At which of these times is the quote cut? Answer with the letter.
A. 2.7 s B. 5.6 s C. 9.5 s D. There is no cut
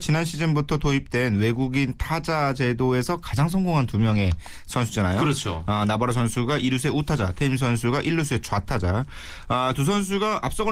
D